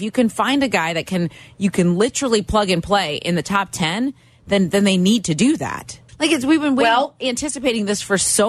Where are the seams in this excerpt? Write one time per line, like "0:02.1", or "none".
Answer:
0:06.1